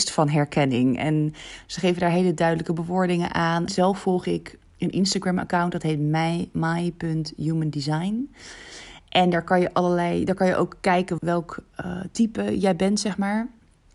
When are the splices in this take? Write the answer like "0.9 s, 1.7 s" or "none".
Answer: 3.7 s, 11.2 s